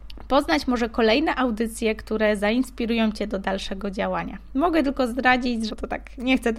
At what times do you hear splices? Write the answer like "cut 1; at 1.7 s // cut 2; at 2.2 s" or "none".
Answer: cut 1; at 5.7 s